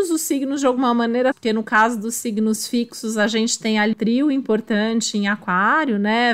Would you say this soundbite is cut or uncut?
cut